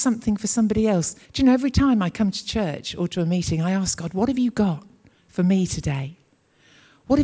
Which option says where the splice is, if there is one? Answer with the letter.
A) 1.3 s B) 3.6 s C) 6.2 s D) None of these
A